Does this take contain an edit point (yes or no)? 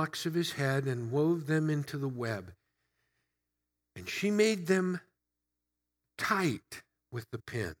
no